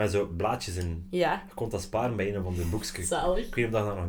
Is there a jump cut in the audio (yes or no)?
no